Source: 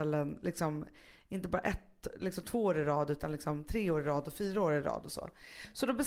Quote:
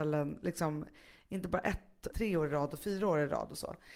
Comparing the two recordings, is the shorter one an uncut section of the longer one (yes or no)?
no